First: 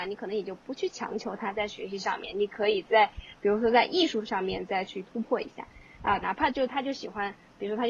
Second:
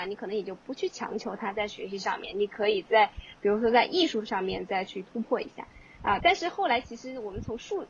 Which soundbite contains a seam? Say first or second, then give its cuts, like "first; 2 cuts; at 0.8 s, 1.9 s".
first; 1 cut; at 6.2 s